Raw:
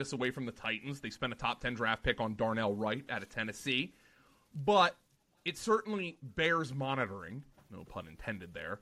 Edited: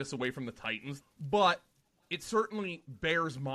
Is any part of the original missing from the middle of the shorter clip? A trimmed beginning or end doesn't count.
yes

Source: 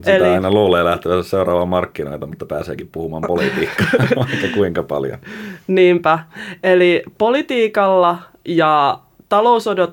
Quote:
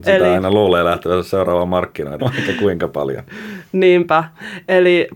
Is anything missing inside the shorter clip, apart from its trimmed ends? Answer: yes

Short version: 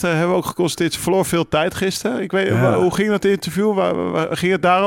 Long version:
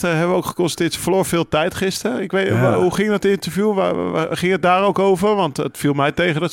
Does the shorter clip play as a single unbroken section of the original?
yes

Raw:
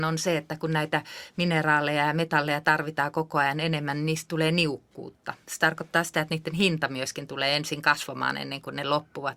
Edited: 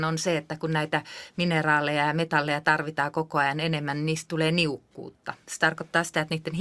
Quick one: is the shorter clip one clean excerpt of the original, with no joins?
yes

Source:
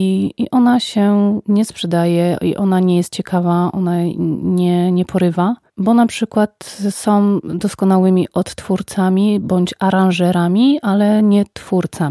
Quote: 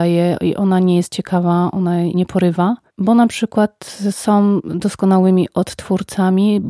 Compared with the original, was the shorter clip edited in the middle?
yes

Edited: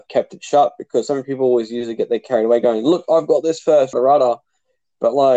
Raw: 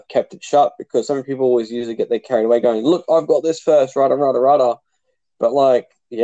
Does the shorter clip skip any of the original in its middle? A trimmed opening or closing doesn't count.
yes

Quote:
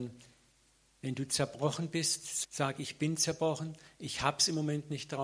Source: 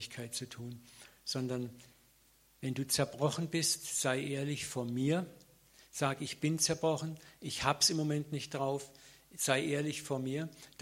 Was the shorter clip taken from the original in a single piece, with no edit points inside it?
no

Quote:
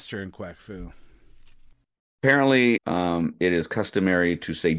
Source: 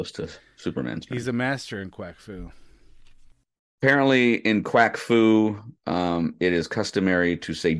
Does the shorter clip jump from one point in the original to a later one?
yes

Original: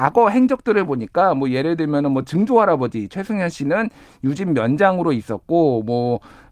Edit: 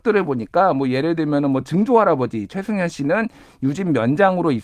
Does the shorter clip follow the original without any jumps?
yes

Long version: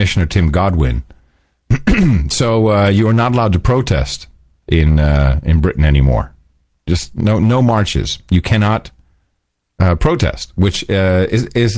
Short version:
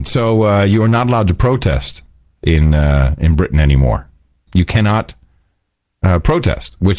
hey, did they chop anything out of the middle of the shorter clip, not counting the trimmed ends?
yes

